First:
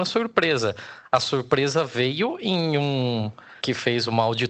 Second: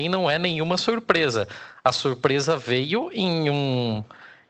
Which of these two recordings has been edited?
first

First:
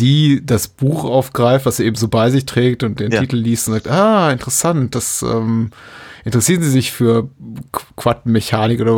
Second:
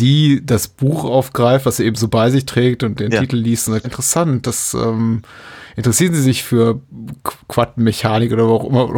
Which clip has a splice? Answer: second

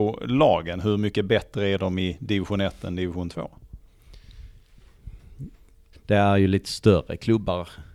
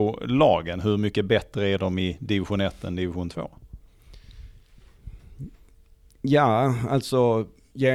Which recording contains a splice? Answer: first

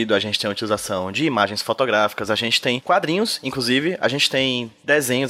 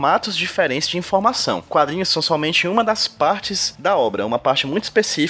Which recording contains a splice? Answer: first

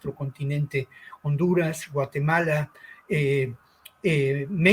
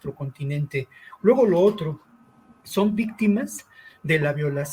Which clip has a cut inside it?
second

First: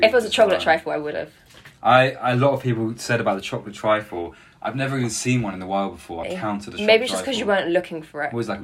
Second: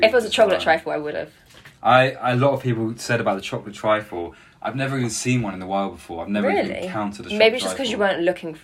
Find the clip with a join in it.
first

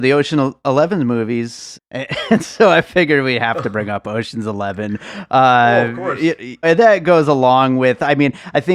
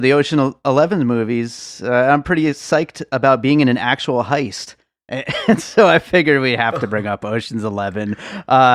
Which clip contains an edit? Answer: first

